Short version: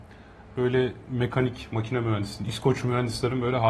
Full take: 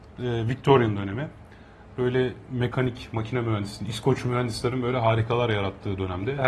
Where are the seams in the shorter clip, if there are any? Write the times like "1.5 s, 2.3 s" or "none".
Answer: none

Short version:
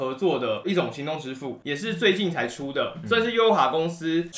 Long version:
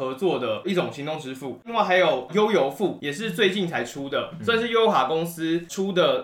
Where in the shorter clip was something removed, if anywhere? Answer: 1.6 s

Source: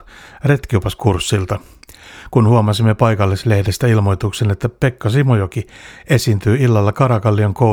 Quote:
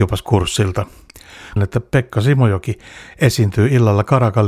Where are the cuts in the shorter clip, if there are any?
1.6 s

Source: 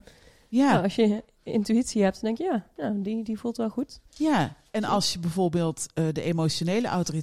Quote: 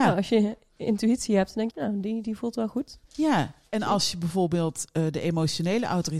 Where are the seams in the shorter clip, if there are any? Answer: 1.7 s

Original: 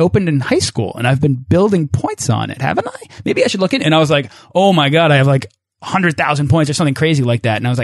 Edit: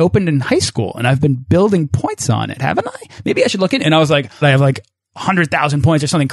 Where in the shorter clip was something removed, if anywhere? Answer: 4.4 s

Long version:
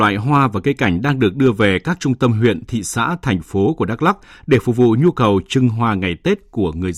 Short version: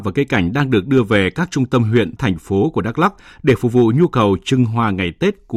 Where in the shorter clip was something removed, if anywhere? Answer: 2.2 s

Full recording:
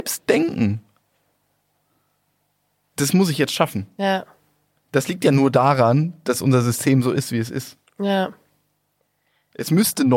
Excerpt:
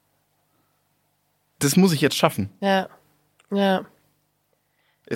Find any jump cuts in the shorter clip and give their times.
3.4 s

